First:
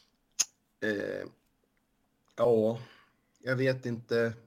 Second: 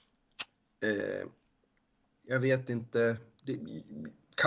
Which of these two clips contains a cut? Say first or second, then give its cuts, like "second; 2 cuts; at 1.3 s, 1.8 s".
second; 1 cut; at 2.2 s